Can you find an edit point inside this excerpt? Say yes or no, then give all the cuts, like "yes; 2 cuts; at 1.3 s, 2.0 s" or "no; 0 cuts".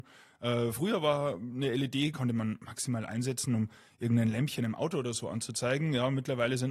no; 0 cuts